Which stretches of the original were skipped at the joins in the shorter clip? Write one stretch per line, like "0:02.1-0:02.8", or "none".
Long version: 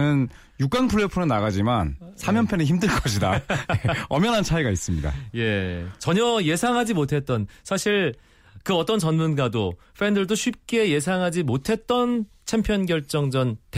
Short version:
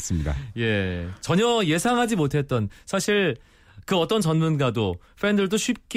none